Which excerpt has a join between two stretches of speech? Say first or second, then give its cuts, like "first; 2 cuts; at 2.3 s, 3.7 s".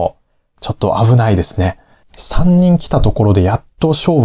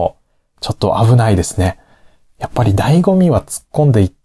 first; 1 cut; at 2.0 s